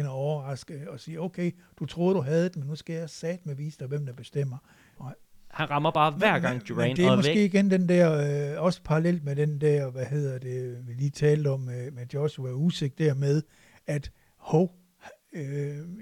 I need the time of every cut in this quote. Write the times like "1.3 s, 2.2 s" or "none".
5.0 s